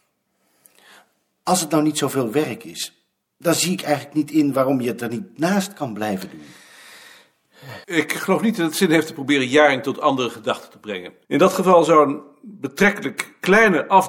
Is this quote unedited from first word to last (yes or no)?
no